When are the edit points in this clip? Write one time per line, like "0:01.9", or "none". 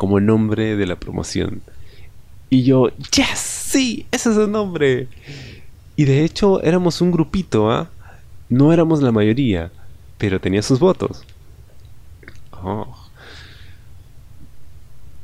0:08.5
0:12.5